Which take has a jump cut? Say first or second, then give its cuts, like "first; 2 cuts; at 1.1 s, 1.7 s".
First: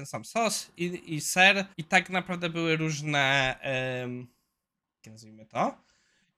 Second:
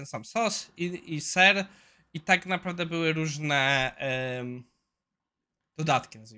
first; 2 cuts; at 1.7 s, 5.0 s